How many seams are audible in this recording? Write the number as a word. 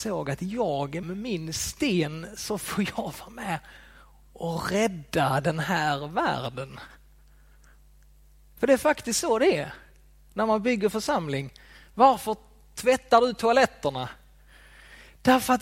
one